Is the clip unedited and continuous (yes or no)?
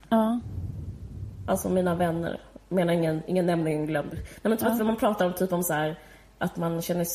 no